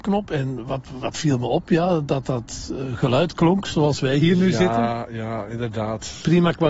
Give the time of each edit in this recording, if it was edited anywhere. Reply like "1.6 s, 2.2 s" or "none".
none